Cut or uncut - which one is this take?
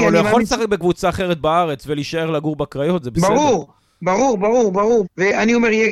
cut